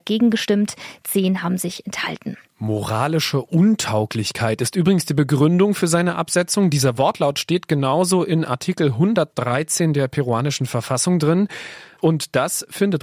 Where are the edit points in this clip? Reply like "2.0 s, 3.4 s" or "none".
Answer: 12.0 s